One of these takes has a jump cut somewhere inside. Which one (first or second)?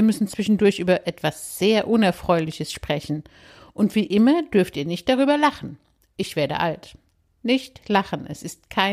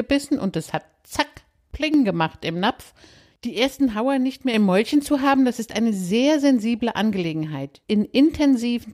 second